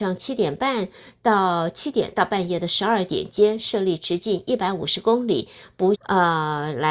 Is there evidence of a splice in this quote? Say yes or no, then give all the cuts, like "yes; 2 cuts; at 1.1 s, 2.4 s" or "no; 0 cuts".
yes; 1 cut; at 5.9 s